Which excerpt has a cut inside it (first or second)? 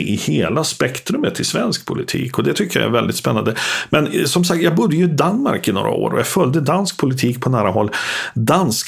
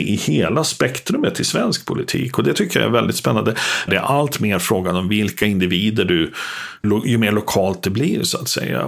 second